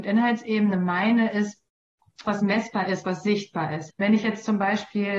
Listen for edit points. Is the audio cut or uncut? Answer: cut